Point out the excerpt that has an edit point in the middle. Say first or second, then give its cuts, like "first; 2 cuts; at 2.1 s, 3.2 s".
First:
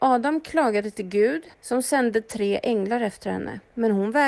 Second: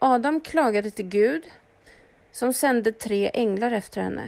first; 1 cut; at 1.5 s